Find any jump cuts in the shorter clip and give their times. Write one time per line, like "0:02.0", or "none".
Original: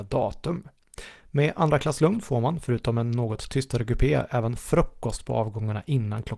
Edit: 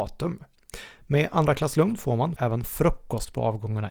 0:02.4